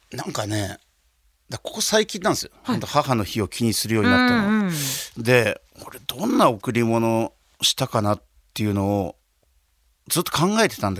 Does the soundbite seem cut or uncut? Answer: uncut